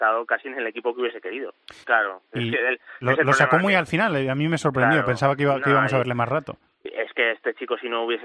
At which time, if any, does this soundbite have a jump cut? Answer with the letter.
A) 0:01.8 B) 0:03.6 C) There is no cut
A